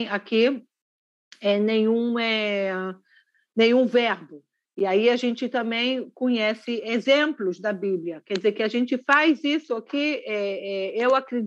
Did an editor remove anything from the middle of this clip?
no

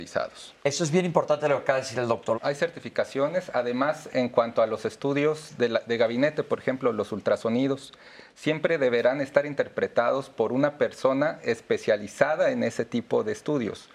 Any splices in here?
yes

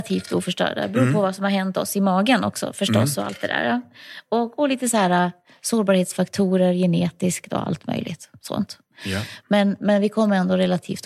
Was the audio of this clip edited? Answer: no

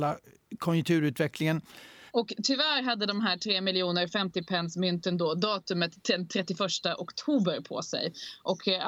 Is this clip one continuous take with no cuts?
no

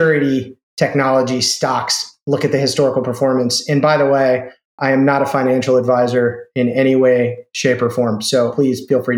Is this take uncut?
yes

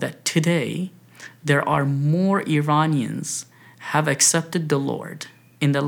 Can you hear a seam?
no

